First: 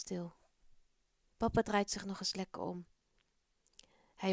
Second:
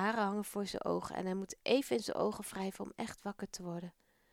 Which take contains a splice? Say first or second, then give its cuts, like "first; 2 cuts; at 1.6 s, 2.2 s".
first; 1 cut; at 1.3 s